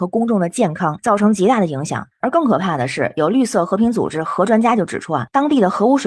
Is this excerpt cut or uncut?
uncut